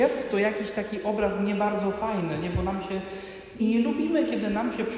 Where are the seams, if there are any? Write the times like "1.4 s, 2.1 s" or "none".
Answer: 3.6 s